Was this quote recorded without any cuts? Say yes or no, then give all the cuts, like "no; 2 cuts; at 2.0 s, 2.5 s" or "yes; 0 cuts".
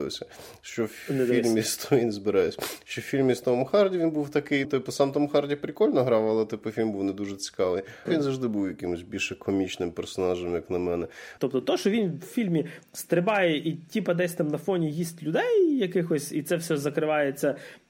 no; 3 cuts; at 4.6 s, 8.1 s, 11.4 s